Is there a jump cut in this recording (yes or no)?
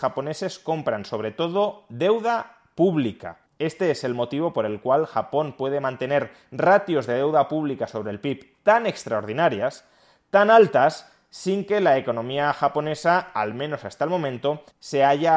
no